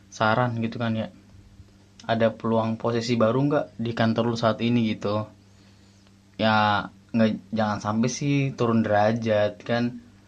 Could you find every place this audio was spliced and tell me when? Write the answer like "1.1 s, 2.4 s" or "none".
2.0 s